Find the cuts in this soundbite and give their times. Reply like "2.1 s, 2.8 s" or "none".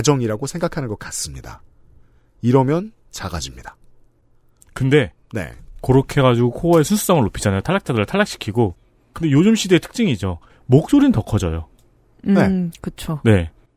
none